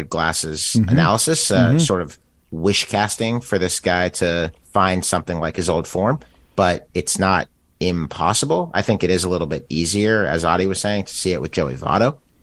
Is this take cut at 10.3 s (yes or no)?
no